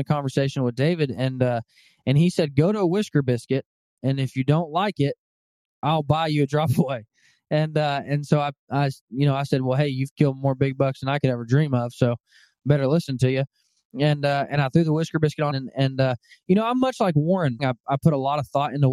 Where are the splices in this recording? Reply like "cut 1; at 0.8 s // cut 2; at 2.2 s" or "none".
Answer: cut 1; at 15.5 s // cut 2; at 17.6 s